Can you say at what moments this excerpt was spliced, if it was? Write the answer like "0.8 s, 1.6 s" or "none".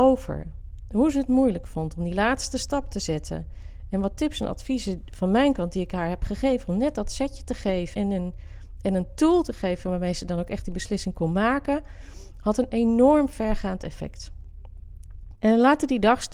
7.9 s, 15.3 s